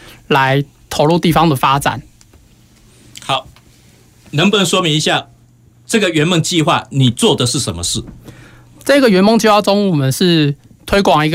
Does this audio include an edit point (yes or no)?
no